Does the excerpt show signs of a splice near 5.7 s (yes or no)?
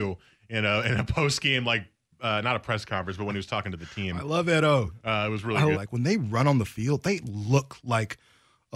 yes